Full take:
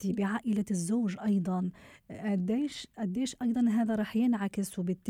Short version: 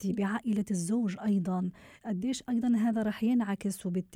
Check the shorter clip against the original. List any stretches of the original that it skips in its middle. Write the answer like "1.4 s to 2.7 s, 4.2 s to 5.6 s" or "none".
2.0 s to 2.9 s

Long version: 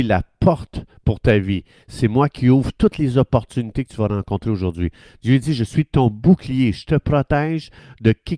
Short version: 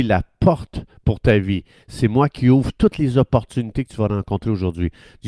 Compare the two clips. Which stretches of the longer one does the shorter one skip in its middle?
none

